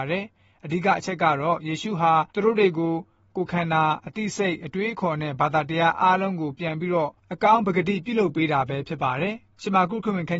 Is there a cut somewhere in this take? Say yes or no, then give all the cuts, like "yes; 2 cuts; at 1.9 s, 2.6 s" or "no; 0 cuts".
yes; 1 cut; at 2.3 s